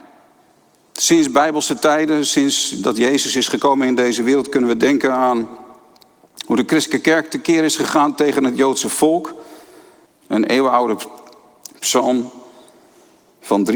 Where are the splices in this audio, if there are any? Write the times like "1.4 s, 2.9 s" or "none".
10.1 s